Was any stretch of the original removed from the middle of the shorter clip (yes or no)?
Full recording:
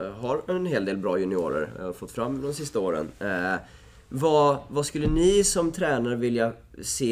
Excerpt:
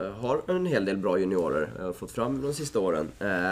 no